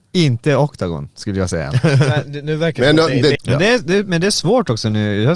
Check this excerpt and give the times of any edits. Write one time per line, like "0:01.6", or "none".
0:03.3